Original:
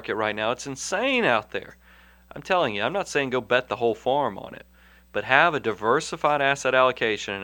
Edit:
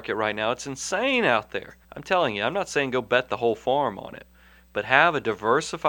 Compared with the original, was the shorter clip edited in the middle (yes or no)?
yes